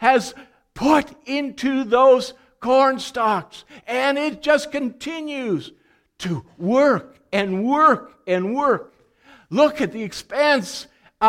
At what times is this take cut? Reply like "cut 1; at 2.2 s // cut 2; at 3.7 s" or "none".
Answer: none